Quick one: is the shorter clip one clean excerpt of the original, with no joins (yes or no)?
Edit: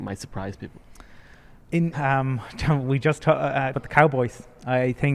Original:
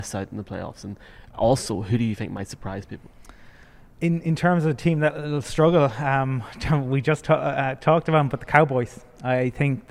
no